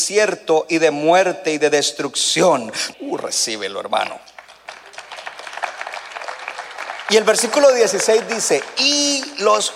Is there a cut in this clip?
yes; 1 cut; at 2.9 s

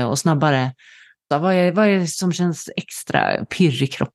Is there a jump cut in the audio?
yes; 1 cut; at 1.3 s

